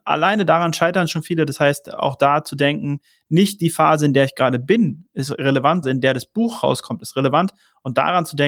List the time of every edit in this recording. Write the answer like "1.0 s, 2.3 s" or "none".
5.8 s